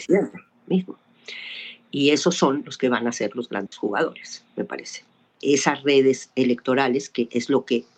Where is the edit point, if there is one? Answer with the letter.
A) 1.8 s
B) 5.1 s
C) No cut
C